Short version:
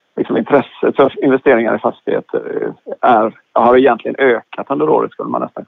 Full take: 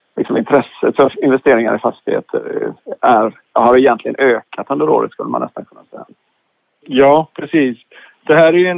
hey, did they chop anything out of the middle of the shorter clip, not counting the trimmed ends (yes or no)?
no